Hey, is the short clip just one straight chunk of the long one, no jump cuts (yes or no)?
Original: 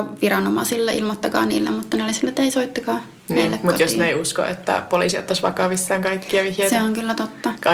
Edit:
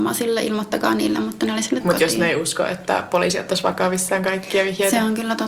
no